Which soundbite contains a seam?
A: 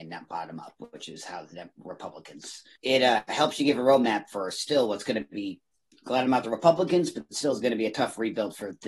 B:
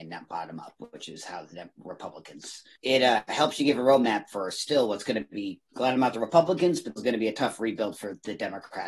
B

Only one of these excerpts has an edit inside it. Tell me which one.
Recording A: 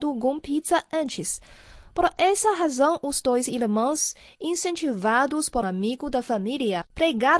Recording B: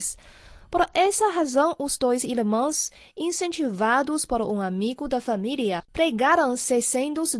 A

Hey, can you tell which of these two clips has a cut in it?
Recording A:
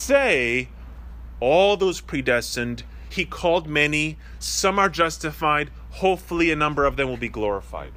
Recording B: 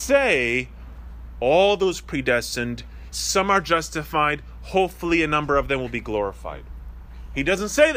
B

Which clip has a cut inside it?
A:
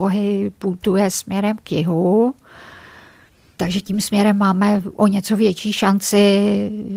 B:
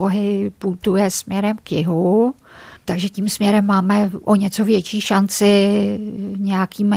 B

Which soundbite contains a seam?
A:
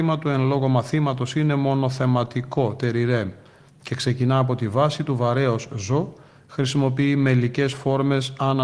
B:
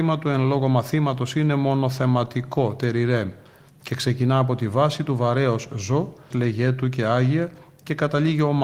B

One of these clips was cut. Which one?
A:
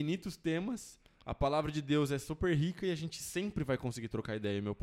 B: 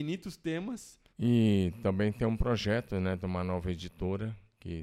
B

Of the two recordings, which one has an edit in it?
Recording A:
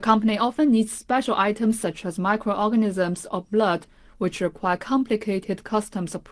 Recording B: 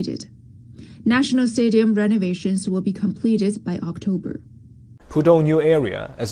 B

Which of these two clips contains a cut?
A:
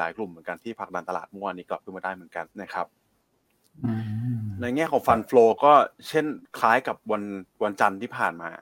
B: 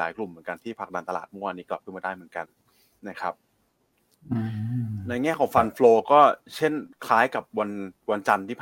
A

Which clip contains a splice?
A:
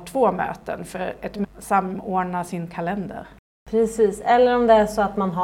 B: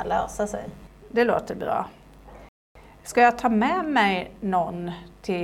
A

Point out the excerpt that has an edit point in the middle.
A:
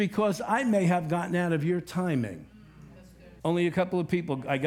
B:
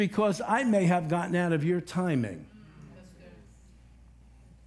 A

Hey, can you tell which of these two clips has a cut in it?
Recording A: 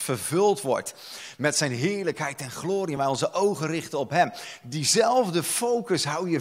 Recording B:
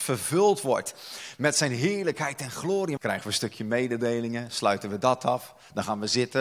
B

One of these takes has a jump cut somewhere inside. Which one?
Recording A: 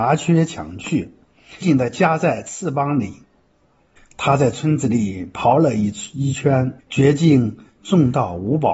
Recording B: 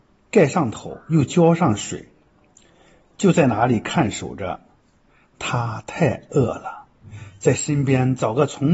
A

